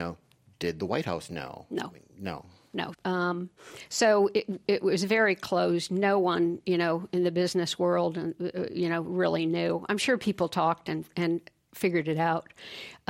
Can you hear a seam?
yes; 1 cut; at 2.9 s

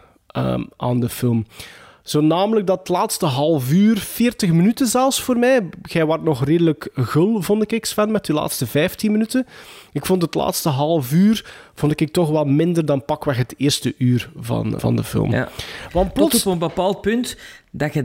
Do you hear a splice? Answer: yes; 1 cut; at 14.8 s

